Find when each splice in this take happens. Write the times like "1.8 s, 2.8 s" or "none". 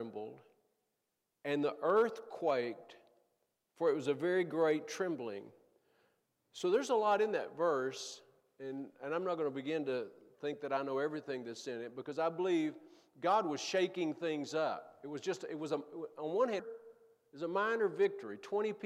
16.6 s